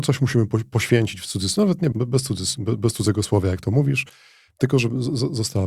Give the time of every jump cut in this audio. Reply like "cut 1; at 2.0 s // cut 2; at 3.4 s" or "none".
cut 1; at 1.9 s